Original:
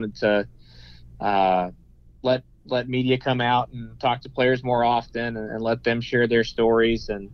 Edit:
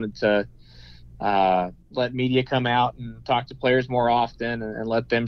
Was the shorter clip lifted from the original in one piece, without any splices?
no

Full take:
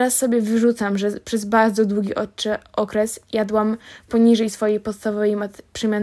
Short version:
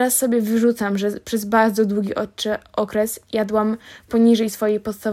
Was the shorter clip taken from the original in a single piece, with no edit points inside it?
yes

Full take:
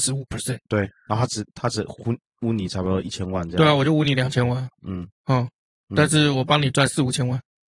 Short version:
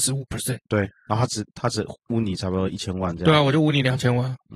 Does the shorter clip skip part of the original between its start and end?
yes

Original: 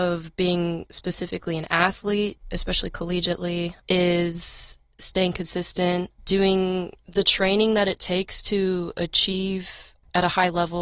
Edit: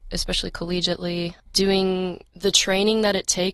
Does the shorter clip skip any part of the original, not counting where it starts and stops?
yes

